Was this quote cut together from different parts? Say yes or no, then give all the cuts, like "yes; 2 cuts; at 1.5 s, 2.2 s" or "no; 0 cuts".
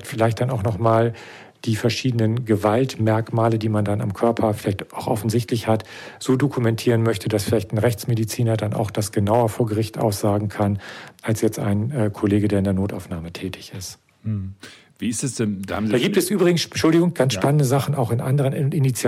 no; 0 cuts